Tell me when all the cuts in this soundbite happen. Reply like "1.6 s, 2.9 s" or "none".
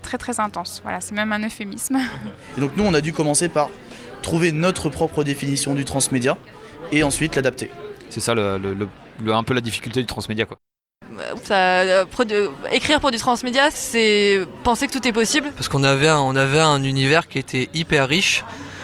11.4 s, 13.7 s

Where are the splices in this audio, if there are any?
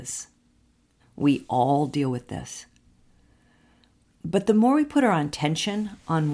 1.0 s

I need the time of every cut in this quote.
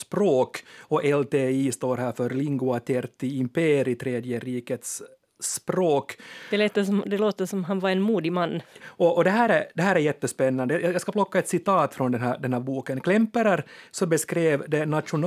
8.8 s

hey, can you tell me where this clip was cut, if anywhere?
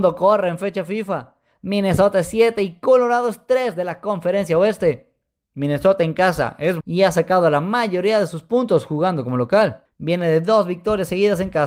6.8 s

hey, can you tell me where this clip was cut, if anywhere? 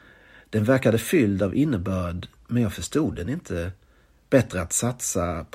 none

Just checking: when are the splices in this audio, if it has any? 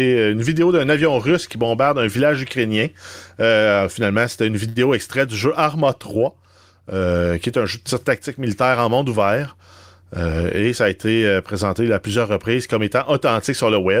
none

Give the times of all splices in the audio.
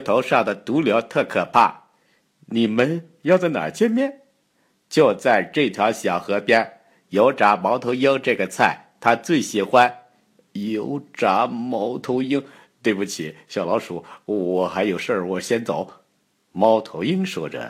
none

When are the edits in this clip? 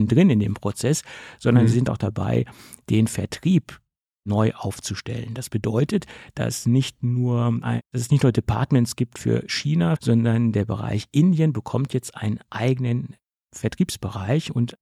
10.0 s

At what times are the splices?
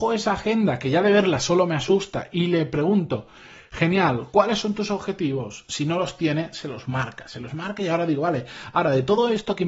none

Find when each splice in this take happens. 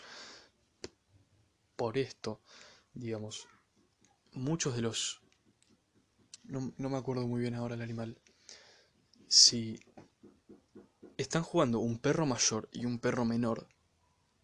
6.4 s

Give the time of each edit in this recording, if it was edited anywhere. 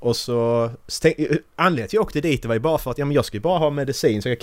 none

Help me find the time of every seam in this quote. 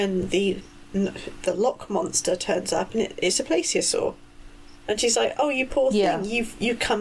none

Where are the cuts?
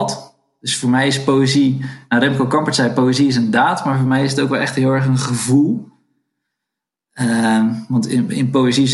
none

